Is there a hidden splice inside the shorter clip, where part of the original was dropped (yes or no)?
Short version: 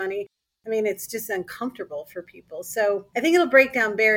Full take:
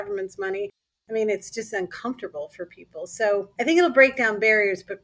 no